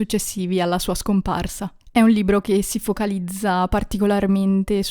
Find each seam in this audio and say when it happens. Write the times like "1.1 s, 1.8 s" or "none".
1.8 s